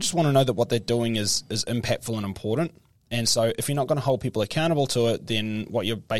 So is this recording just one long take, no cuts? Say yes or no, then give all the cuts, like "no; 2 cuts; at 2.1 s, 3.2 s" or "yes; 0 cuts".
yes; 0 cuts